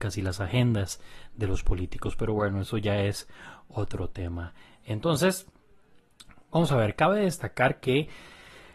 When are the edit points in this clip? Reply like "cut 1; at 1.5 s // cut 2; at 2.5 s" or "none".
none

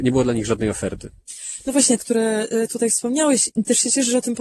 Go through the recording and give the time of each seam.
cut 1; at 2.0 s // cut 2; at 3.5 s

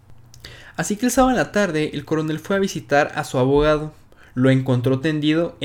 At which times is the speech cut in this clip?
none

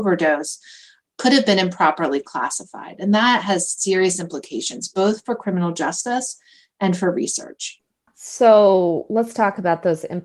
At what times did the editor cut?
cut 1; at 8.1 s

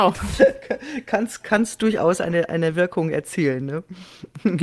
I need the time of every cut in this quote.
none

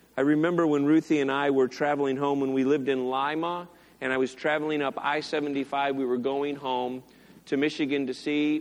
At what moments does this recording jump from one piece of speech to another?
none

